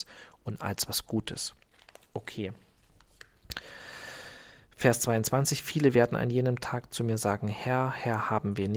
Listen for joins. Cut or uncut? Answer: uncut